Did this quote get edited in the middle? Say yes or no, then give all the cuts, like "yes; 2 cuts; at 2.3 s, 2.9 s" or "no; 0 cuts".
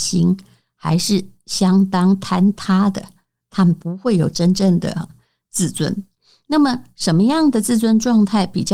no; 0 cuts